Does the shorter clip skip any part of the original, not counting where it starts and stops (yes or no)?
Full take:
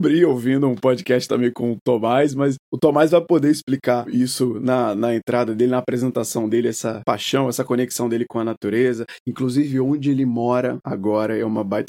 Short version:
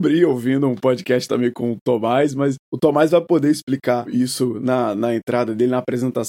no